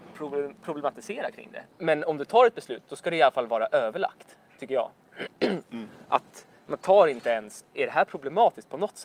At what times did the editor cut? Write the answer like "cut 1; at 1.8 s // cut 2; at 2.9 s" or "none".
cut 1; at 1.7 s // cut 2; at 5.6 s // cut 3; at 7.7 s